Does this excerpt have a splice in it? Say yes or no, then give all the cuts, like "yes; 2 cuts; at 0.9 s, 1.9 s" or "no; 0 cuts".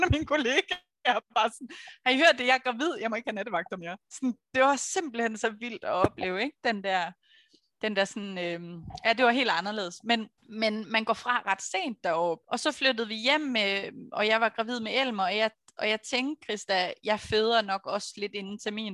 yes; 2 cuts; at 10.4 s, 12.4 s